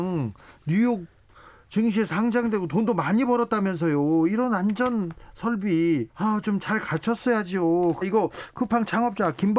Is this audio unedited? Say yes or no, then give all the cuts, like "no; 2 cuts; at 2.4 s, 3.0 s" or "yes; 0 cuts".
no; 2 cuts; at 6.1 s, 8.0 s